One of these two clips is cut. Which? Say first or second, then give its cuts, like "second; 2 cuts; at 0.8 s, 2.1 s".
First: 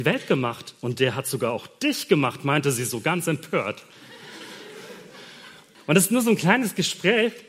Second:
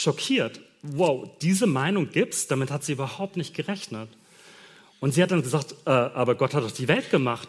first; 1 cut; at 5.7 s